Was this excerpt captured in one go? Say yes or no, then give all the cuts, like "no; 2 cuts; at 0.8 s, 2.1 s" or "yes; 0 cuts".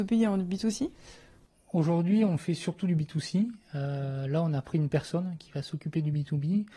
yes; 0 cuts